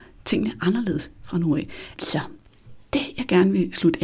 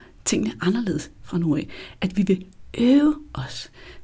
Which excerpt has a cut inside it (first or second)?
first